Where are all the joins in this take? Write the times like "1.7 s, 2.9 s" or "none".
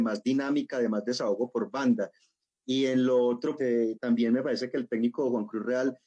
3.6 s